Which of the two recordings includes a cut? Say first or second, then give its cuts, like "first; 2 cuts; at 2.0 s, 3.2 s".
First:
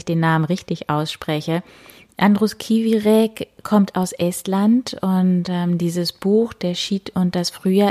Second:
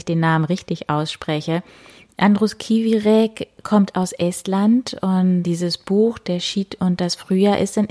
second; 1 cut; at 5.4 s